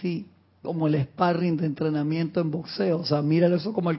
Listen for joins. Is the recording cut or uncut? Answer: uncut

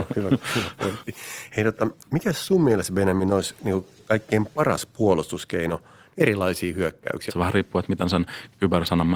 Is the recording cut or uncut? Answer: cut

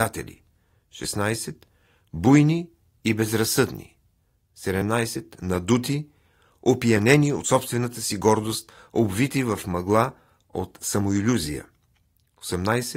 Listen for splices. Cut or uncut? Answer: uncut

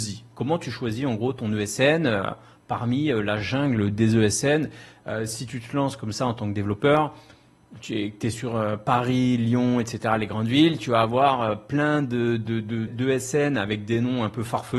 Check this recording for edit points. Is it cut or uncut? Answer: cut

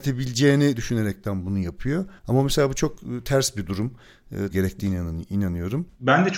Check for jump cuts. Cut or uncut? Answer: cut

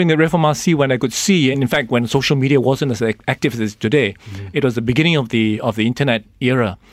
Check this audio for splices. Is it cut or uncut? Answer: uncut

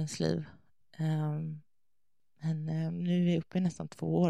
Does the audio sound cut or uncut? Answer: cut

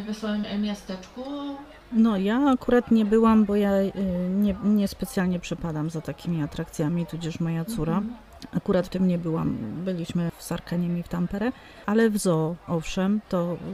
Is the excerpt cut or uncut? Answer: uncut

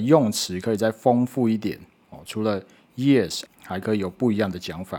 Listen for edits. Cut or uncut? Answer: cut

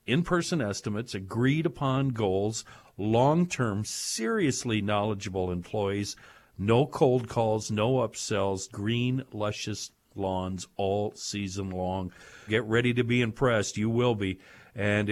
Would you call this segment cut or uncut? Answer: cut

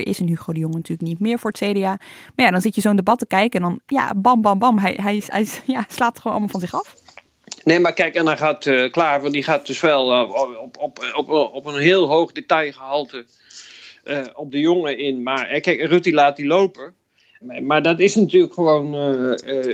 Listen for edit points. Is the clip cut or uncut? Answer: uncut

